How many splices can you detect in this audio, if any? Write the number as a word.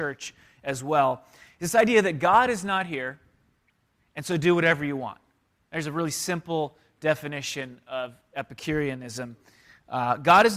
one